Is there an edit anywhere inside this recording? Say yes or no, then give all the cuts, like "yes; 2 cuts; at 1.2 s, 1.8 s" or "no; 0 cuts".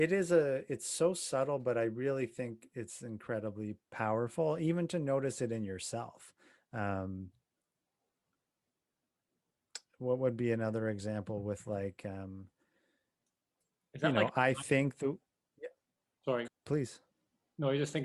yes; 1 cut; at 16.5 s